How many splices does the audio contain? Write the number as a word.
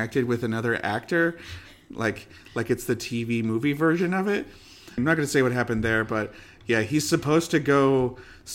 one